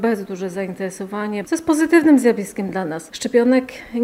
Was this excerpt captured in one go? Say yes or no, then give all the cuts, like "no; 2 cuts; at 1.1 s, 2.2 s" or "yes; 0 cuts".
no; 1 cut; at 1.4 s